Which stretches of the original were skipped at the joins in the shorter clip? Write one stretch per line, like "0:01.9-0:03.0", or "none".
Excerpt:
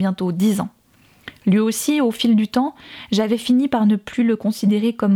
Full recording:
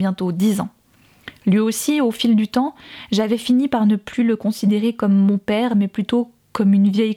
none